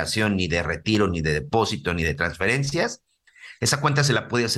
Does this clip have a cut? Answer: no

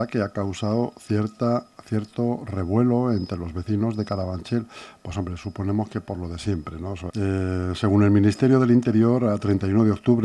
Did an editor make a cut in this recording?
yes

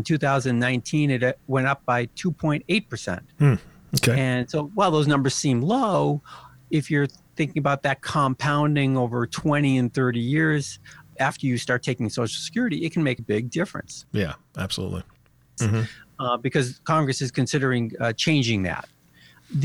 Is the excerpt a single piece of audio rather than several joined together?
no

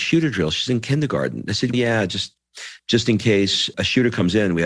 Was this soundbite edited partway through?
yes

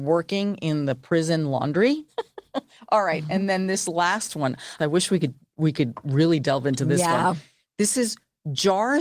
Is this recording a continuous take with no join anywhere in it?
no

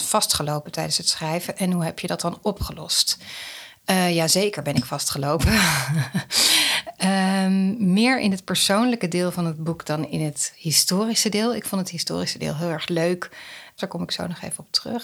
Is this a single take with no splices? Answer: no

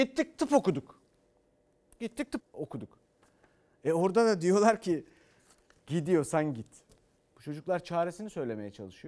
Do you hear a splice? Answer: yes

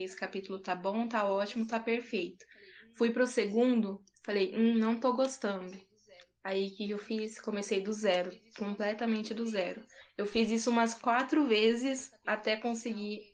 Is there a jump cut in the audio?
no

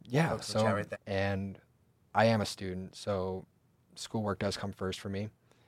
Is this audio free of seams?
no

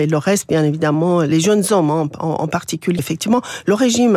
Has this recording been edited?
yes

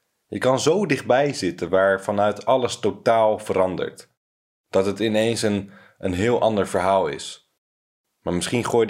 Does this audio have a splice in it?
no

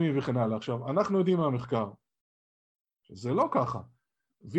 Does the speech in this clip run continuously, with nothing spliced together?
yes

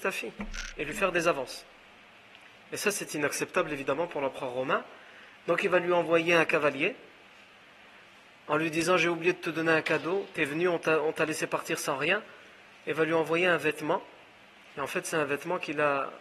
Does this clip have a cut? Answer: no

